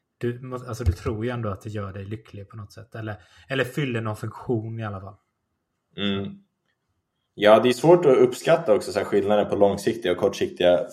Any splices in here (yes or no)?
no